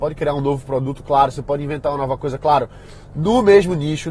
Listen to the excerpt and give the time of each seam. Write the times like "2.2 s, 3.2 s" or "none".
none